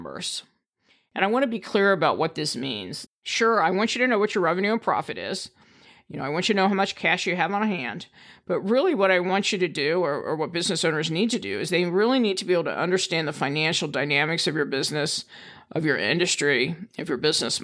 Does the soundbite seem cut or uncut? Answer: cut